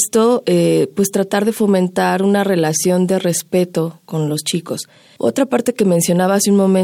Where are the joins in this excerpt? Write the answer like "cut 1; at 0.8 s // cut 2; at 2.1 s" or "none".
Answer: cut 1; at 5.2 s